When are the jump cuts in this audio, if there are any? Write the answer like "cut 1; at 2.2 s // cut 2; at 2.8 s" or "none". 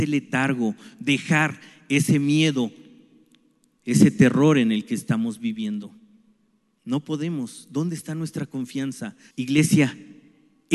cut 1; at 9.3 s